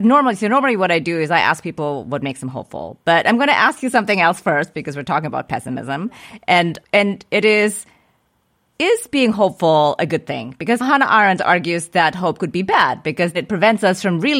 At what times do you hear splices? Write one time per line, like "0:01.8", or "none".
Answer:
0:11.4
0:13.3